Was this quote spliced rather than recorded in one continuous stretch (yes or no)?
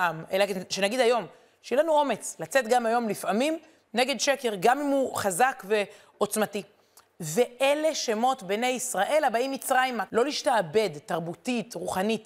yes